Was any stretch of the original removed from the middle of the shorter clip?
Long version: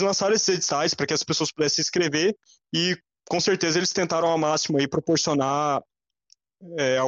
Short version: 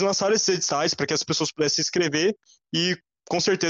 no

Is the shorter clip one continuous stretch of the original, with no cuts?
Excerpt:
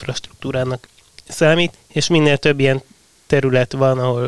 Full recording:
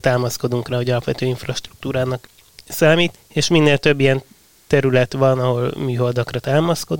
yes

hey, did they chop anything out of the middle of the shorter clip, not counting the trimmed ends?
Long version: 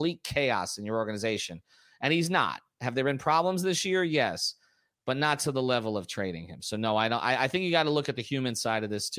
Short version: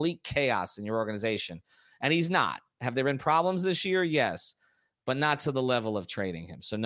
no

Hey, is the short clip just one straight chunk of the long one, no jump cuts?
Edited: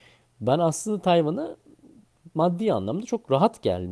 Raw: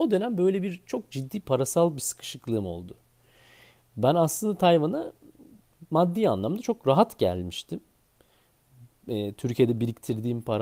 yes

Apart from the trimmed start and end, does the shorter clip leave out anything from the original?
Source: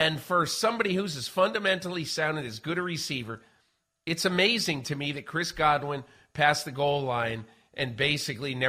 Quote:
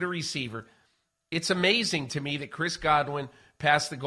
no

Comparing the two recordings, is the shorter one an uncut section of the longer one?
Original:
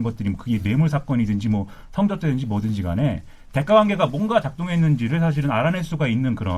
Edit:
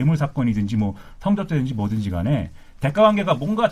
yes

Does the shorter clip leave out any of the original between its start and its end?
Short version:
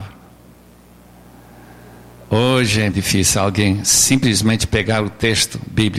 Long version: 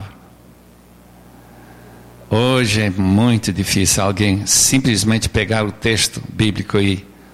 yes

